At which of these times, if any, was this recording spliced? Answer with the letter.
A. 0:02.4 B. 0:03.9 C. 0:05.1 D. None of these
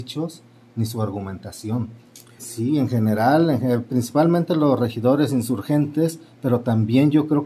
A